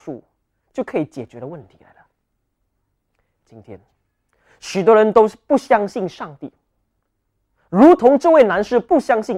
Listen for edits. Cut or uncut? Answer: uncut